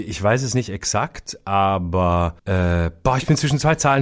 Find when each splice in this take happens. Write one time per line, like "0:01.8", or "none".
0:02.4